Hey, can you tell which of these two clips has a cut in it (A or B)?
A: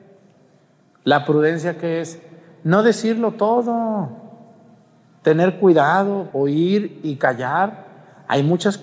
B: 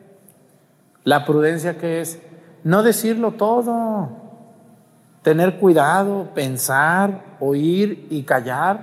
A